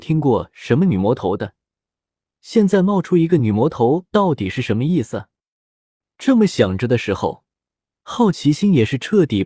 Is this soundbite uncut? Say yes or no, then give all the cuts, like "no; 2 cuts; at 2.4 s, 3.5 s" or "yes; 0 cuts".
yes; 0 cuts